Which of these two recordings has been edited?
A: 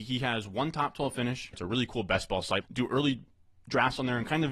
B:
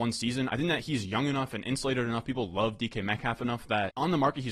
A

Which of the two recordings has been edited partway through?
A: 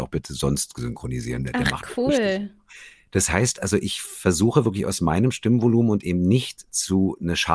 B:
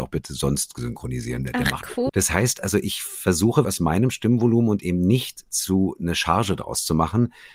B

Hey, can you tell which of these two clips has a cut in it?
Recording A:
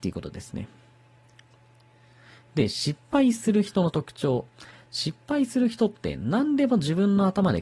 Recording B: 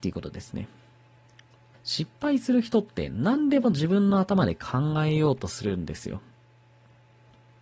B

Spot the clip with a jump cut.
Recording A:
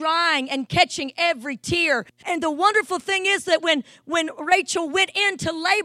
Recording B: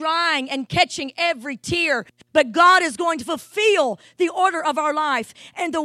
A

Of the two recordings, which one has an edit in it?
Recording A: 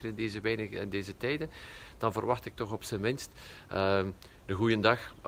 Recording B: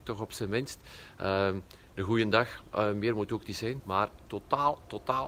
B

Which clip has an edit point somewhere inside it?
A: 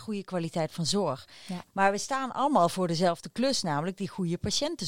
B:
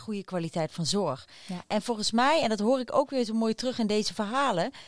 A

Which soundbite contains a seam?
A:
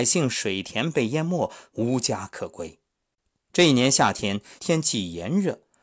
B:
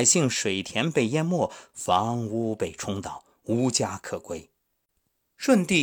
A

